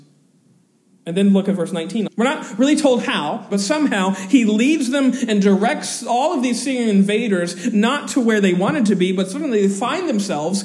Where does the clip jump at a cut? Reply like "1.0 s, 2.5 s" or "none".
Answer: 2.1 s, 3.5 s